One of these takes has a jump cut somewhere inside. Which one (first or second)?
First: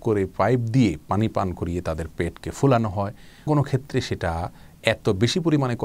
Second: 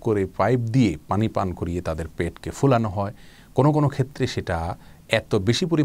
first